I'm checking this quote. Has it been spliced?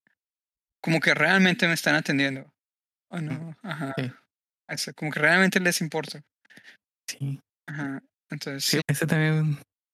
yes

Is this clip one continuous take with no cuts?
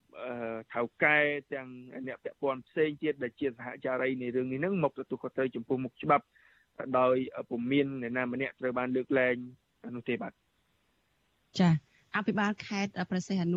yes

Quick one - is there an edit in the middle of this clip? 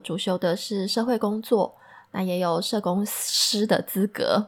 no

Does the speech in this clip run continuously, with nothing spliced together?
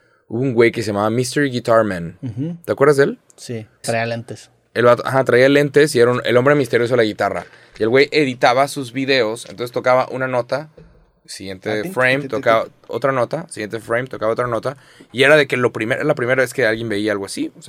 no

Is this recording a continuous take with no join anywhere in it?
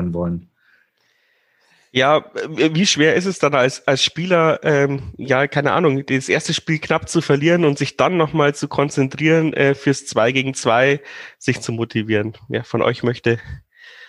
yes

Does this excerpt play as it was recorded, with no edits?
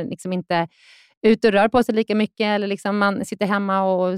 yes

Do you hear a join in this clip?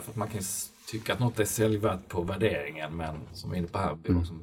yes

